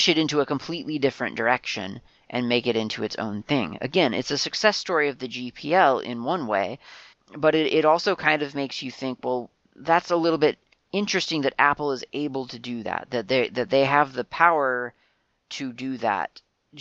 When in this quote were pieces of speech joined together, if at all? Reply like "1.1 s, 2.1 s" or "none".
none